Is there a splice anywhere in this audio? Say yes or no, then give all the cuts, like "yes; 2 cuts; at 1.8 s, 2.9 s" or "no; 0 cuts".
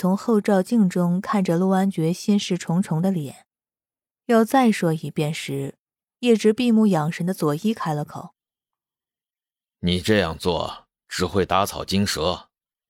no; 0 cuts